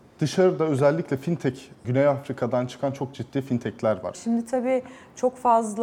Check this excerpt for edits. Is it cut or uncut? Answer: cut